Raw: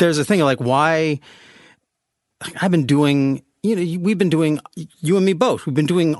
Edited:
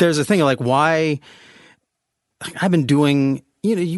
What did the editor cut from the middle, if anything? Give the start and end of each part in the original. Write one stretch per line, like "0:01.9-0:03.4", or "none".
none